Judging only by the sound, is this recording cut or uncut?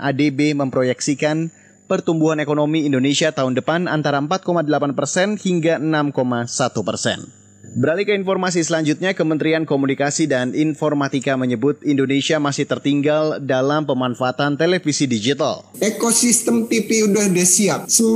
cut